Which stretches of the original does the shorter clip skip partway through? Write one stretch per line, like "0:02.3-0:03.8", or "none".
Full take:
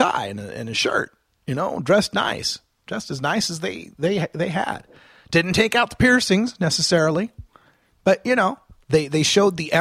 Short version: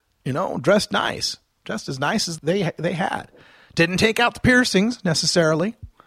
0:03.6-0:03.9